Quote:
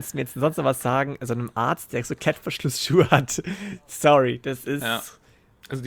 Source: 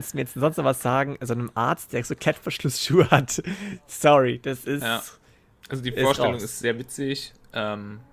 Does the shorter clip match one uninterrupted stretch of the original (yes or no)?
yes